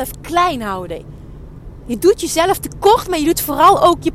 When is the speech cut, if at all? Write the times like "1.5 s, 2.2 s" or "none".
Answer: none